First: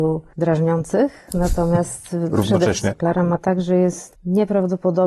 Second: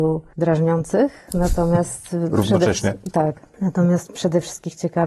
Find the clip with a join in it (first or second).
first